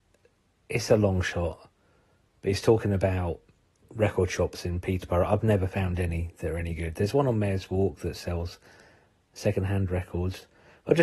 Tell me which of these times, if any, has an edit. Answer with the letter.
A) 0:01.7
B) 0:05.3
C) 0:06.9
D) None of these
D